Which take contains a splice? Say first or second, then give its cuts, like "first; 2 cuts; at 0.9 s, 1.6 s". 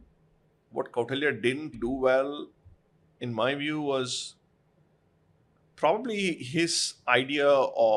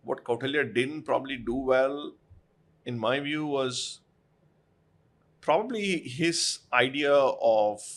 first; 1 cut; at 1.7 s